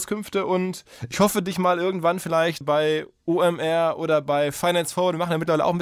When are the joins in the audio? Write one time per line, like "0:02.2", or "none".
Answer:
0:02.6